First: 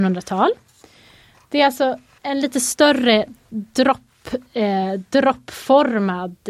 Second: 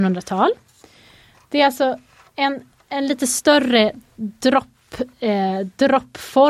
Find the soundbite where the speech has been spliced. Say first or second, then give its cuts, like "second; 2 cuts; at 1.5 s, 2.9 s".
first; 1 cut; at 2.2 s